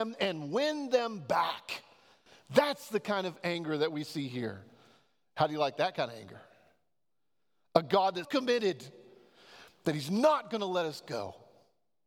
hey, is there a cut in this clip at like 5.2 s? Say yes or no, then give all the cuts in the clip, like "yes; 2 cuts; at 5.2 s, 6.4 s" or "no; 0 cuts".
no; 1 cut; at 8.2 s